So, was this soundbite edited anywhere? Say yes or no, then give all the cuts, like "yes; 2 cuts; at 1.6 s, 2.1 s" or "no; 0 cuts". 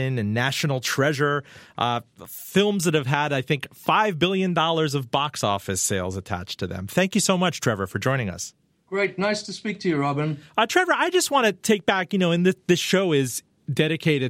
no; 0 cuts